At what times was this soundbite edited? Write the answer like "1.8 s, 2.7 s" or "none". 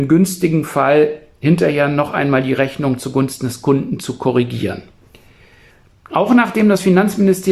none